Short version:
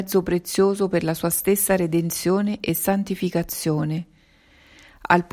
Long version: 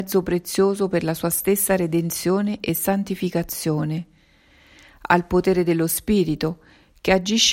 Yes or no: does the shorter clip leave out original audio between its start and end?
no